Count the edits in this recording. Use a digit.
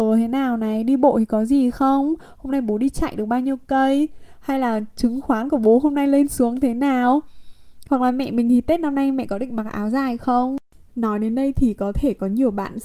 0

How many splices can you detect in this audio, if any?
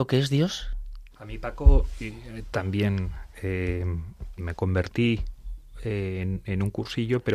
2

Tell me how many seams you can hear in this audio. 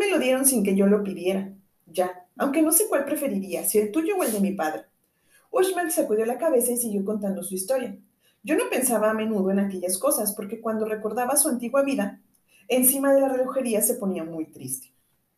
1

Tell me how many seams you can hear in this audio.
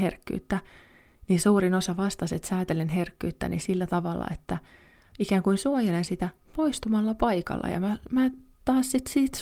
0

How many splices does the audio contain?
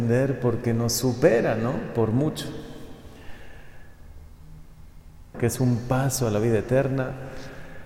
1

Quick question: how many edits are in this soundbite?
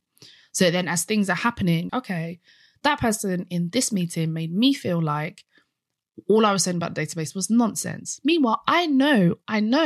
1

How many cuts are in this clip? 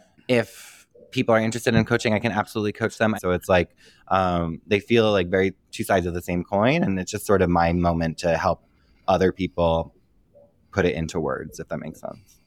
1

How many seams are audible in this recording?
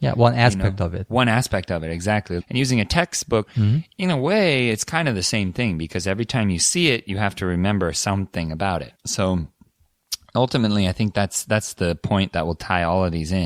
3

